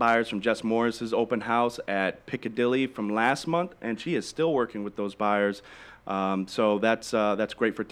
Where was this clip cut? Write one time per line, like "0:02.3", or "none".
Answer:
none